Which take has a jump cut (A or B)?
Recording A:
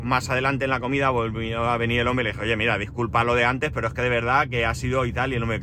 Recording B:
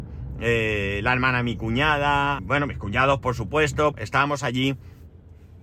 B